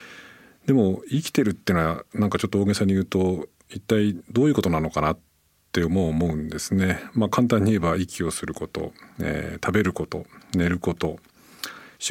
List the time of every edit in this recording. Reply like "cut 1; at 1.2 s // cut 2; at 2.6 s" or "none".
none